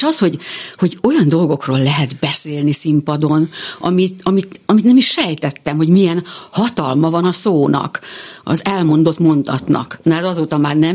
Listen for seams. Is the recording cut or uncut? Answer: uncut